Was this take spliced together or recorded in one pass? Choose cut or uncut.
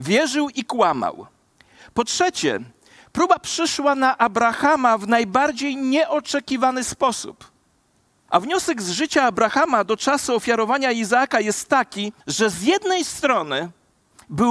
cut